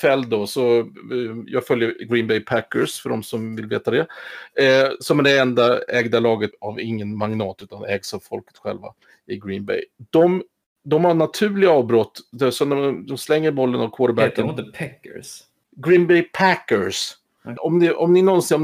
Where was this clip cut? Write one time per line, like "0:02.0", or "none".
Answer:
0:06.5
0:17.6